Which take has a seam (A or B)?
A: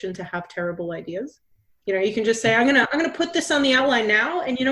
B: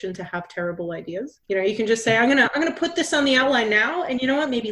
B